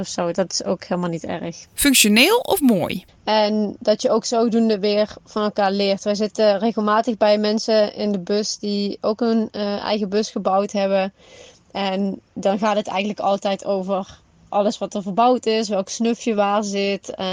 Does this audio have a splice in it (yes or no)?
yes